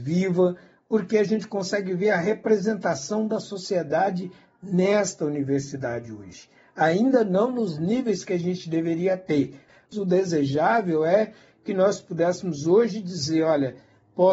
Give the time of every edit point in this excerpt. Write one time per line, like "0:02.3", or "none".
none

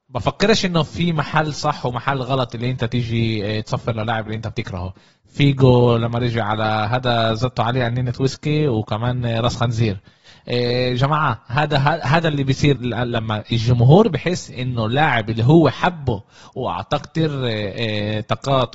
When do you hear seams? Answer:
0:12.8

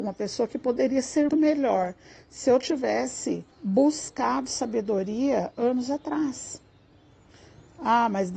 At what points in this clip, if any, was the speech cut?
0:01.3
0:03.5

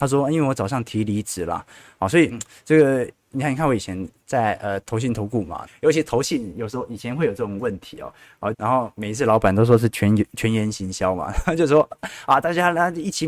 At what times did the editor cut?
0:03.2
0:05.7
0:08.5

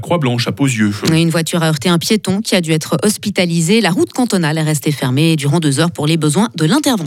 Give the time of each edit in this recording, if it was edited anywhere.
none

